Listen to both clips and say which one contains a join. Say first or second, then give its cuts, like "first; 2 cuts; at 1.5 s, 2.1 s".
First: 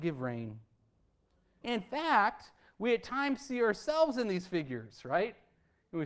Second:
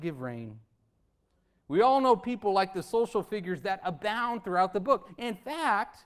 first; 1 cut; at 1.6 s